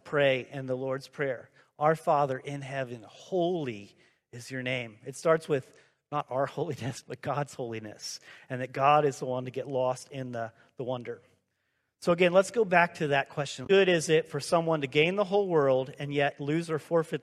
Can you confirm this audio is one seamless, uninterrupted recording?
yes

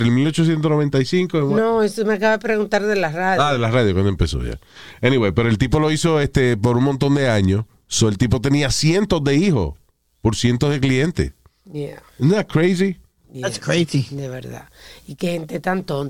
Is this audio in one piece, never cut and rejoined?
yes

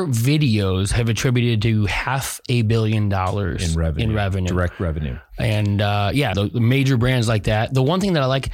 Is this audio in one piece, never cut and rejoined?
no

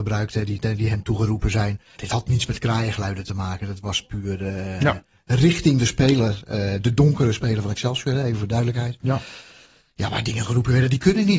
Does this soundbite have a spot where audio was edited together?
no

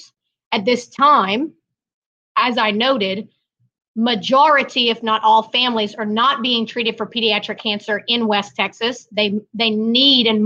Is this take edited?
no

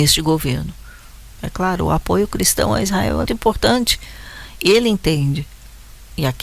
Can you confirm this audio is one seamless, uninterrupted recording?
no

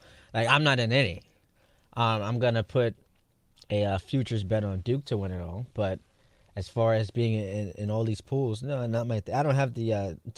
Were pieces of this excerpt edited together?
no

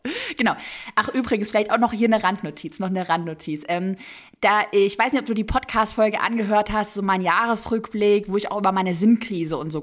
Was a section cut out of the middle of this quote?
no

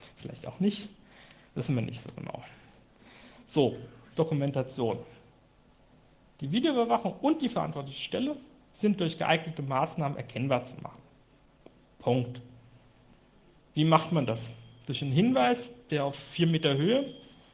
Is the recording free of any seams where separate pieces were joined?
no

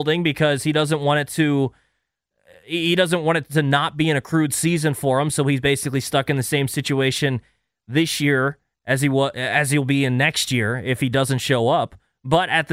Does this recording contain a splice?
no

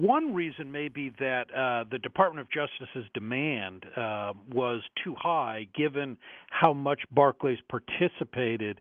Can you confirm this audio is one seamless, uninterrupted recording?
yes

